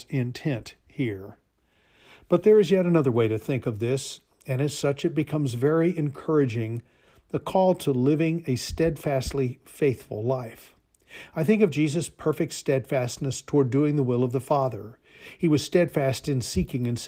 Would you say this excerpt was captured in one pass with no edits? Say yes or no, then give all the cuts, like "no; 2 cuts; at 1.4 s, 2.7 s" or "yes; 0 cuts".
yes; 0 cuts